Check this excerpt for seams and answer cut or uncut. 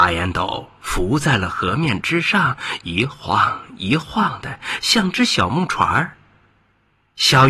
uncut